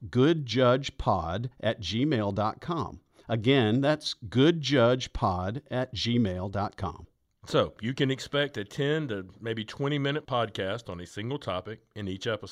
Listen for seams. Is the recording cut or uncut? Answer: cut